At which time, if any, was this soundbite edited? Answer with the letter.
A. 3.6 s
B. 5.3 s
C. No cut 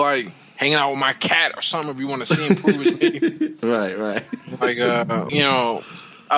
B